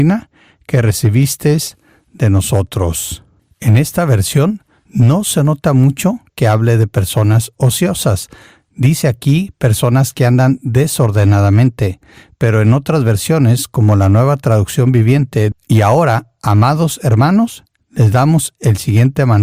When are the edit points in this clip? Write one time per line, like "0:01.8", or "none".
0:15.5